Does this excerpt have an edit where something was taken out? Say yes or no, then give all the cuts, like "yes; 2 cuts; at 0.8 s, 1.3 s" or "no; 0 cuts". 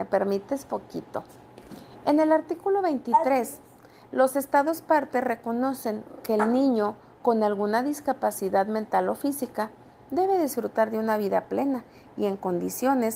no; 0 cuts